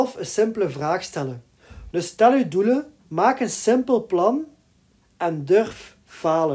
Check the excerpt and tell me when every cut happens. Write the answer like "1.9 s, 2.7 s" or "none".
1.9 s, 3.0 s

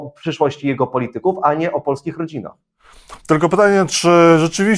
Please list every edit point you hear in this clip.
3.2 s

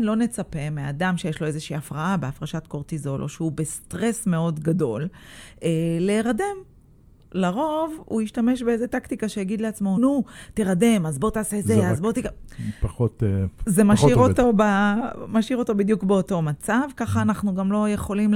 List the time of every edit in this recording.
10.0 s

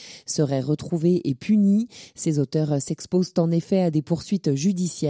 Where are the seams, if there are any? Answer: none

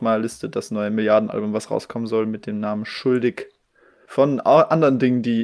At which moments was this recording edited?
4.1 s

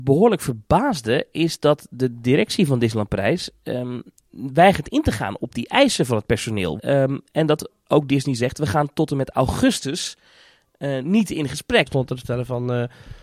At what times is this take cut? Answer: 6.8 s, 11.9 s

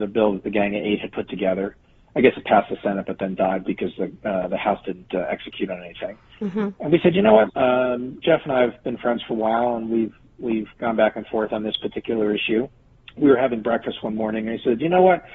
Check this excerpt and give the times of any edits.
7.5 s

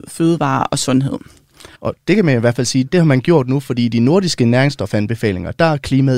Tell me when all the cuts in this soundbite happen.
1.7 s, 2.9 s

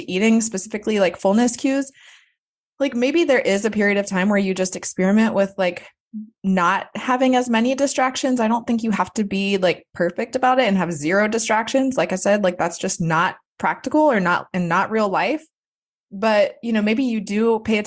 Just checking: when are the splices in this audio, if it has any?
none

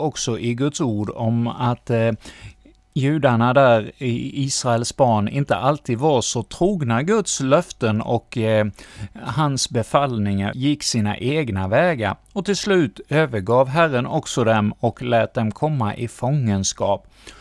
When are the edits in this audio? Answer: 10.5 s

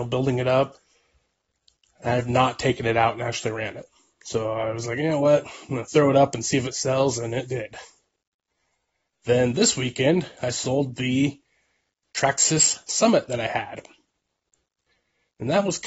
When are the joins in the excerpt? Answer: none

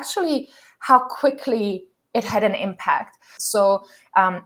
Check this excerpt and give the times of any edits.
3.4 s

